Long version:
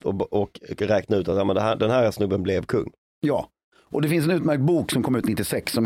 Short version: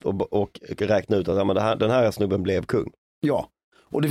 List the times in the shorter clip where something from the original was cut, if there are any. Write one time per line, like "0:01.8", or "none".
none